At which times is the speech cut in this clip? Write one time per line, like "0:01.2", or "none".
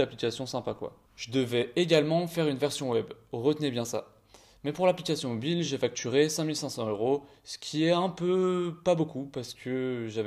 none